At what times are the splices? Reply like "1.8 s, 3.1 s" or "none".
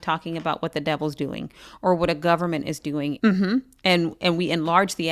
3.2 s